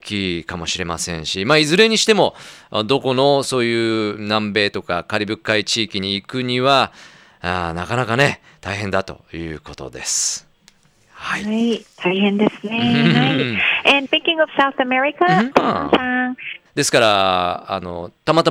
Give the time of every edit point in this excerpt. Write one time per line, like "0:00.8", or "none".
0:14.1
0:15.5
0:16.7